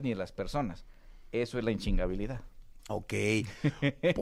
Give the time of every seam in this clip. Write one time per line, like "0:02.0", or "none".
0:02.9